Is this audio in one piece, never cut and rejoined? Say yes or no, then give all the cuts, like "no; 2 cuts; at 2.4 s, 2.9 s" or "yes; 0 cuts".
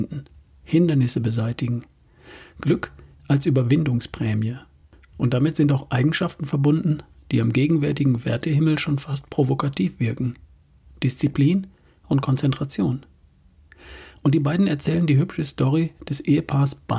yes; 0 cuts